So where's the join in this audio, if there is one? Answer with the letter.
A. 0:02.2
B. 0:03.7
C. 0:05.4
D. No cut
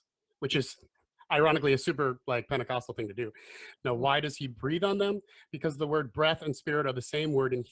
B